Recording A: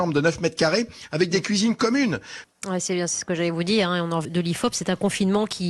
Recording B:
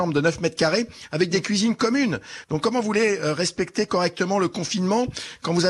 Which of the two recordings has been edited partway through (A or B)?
A